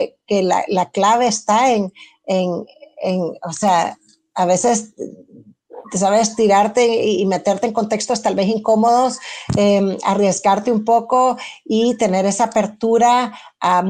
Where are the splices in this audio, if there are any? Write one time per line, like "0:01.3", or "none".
none